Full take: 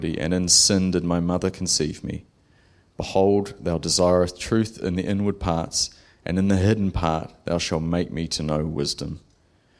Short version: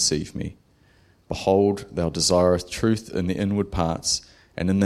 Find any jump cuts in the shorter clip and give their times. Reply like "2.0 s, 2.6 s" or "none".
none